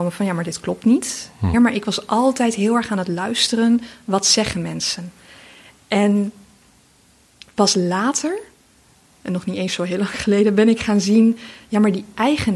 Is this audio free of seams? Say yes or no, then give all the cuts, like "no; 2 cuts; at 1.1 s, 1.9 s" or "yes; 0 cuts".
no; 1 cut; at 1.5 s